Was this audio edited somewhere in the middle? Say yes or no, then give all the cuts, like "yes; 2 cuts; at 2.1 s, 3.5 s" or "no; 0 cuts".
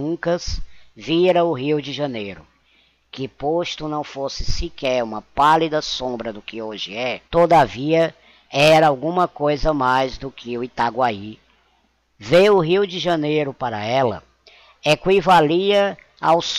yes; 1 cut; at 7.3 s